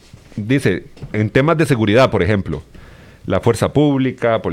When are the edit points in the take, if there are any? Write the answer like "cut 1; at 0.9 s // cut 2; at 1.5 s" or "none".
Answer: none